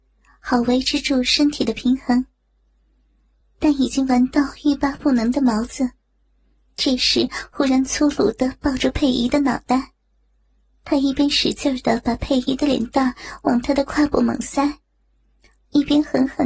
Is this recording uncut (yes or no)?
yes